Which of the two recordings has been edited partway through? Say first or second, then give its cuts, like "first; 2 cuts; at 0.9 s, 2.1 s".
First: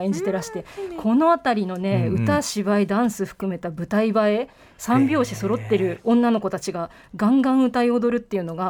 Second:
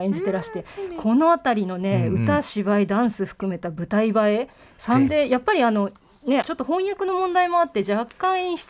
second; 2 cuts; at 5.1 s, 6.4 s